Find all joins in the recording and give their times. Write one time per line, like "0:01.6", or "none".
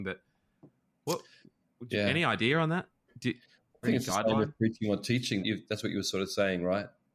0:03.8
0:05.4